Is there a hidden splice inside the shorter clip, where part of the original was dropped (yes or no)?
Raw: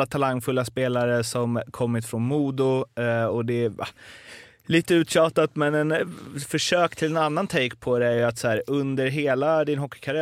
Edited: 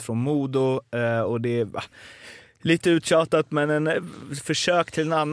no